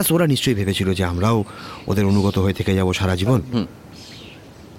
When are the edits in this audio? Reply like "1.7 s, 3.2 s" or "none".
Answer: 3.5 s